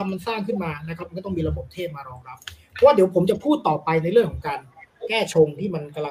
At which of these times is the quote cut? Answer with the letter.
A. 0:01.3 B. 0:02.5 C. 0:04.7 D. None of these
D